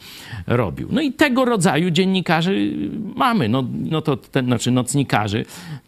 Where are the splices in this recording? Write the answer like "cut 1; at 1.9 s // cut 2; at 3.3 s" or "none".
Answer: cut 1; at 3.9 s

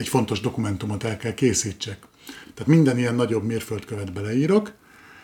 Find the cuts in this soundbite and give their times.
none

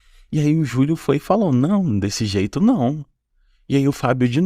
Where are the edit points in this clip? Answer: none

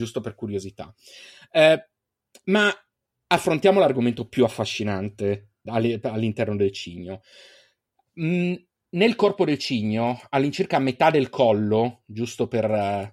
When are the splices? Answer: cut 1; at 5.7 s

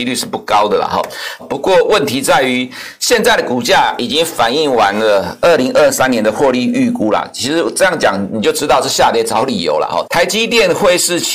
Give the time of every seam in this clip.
cut 1; at 1.4 s // cut 2; at 10.0 s

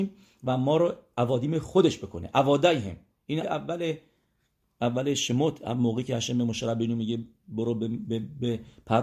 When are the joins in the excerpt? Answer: cut 1; at 3.4 s

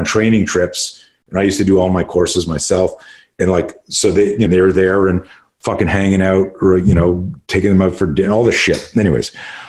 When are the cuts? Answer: cut 1; at 4.5 s

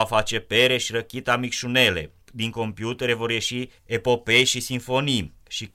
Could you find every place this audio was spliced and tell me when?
cut 1; at 2.2 s // cut 2; at 3.8 s

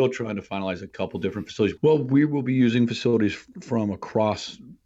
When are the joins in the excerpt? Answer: cut 1; at 1.8 s

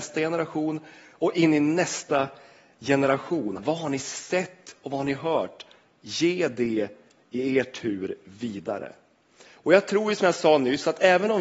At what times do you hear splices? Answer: cut 1; at 3.6 s

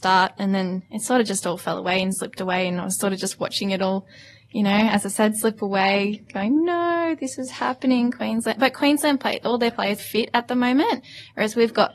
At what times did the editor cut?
cut 1; at 10.0 s

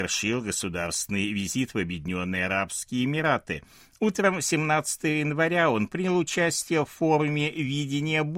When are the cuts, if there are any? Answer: none

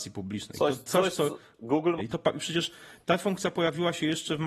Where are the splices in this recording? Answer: cut 1; at 2.0 s

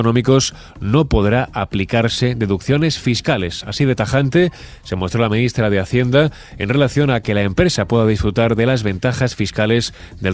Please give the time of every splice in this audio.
none

